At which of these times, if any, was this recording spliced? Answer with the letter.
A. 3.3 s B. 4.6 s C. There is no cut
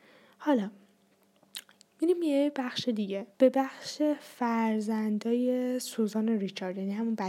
A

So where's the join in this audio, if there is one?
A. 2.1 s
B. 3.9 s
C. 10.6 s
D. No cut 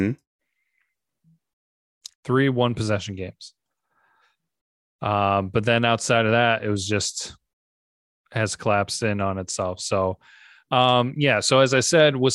A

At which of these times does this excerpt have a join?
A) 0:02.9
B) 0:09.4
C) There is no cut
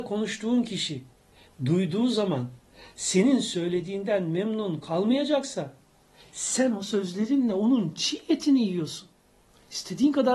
C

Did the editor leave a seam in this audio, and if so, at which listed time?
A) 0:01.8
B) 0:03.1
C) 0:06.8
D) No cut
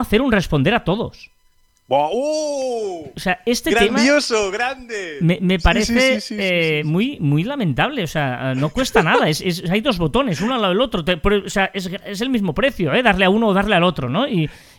D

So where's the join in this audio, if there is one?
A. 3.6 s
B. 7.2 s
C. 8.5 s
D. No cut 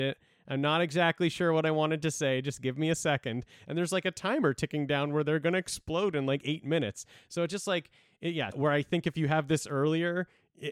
C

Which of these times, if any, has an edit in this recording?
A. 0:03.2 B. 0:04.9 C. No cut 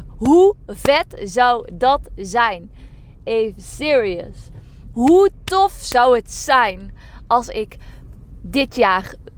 B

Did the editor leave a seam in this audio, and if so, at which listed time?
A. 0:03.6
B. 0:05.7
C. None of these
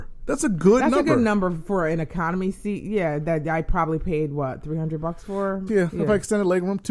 B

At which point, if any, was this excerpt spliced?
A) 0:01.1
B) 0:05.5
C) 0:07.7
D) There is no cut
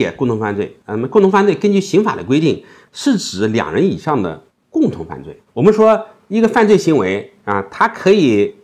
B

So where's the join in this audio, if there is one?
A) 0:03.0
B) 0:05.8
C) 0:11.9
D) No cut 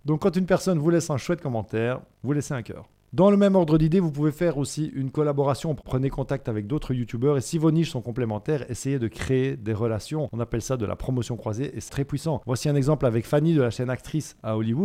C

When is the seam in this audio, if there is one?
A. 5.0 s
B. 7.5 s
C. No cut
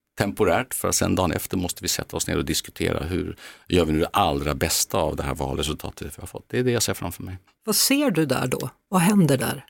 B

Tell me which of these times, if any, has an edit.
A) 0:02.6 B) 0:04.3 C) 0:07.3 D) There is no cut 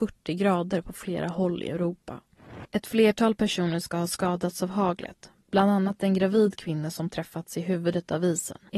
A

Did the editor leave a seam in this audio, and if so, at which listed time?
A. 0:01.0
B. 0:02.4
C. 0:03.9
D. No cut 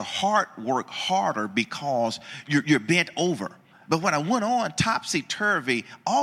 C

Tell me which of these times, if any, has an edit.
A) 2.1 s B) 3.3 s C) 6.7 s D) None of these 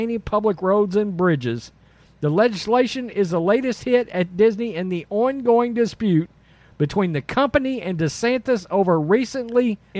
A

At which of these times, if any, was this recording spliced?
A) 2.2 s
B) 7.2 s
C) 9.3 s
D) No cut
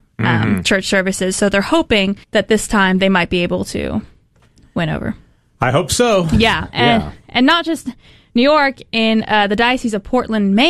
A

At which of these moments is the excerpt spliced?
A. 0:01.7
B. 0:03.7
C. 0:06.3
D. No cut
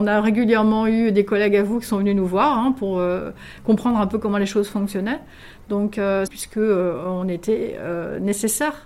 C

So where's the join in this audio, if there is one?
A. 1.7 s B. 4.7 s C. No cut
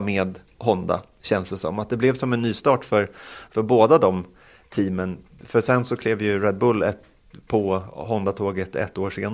C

